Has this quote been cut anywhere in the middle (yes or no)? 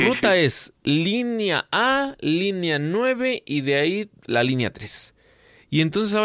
no